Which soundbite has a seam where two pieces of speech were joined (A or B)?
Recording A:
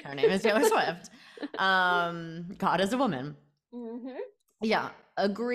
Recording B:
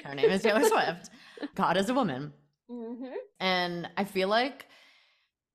B